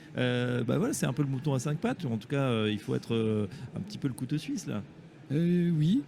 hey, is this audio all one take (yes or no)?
yes